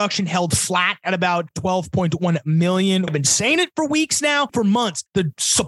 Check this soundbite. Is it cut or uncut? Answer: cut